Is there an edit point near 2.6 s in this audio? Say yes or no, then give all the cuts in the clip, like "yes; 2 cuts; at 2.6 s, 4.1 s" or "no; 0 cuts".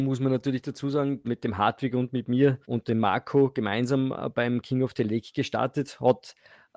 yes; 2 cuts; at 1.2 s, 2.6 s